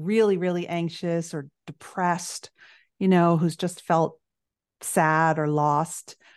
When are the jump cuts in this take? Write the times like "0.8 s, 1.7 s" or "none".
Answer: none